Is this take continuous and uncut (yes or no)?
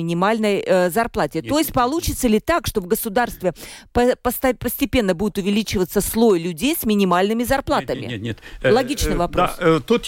yes